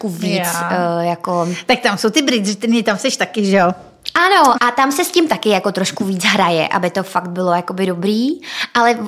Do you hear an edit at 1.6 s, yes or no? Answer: no